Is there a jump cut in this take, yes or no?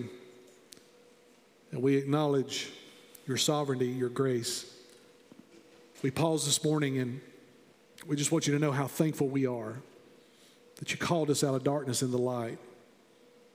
no